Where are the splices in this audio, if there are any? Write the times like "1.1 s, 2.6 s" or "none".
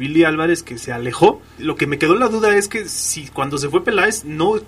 1.6 s